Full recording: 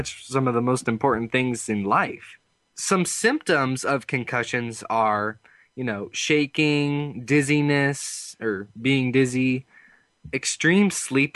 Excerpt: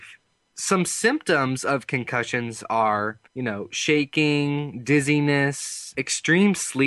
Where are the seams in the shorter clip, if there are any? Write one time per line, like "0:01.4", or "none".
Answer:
0:03.3
0:05.9